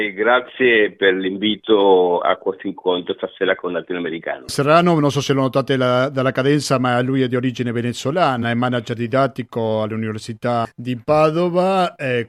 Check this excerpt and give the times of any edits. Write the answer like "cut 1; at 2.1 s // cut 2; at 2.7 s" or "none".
none